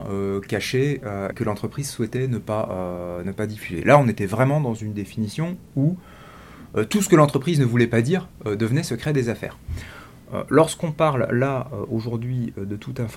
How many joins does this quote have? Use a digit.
1